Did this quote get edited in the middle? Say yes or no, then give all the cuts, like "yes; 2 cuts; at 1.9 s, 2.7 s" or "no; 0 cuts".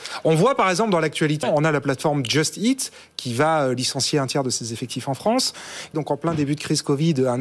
yes; 2 cuts; at 1.4 s, 5.9 s